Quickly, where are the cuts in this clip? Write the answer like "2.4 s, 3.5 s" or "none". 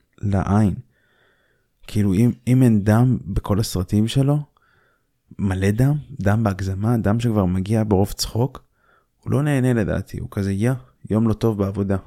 none

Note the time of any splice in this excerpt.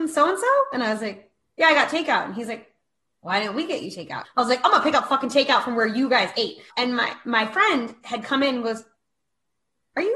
4.2 s, 6.7 s

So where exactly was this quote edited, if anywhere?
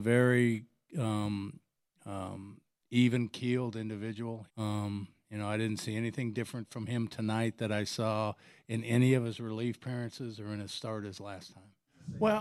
4.5 s

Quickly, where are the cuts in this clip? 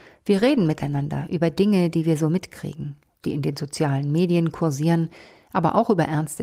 3.2 s

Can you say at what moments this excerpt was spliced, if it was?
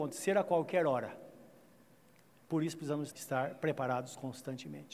3.1 s

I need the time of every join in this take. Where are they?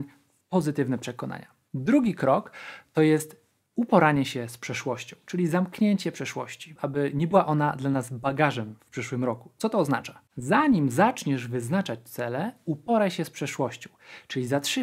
6.8 s

